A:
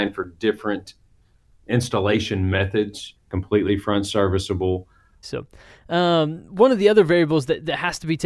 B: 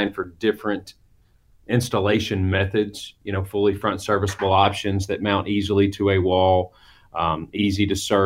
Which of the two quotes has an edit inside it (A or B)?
A